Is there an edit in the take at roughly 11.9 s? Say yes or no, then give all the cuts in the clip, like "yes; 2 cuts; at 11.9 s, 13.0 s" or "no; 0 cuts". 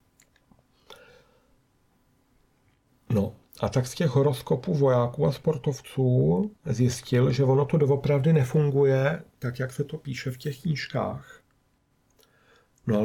no; 1 cut; at 6.6 s